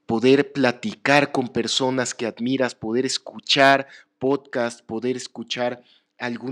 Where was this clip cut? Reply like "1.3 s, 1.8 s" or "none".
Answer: none